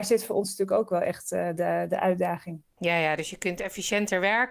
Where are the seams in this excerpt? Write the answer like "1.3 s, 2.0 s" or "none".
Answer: none